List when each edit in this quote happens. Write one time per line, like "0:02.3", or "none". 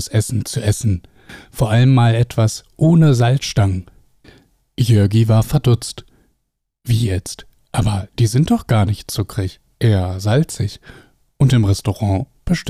none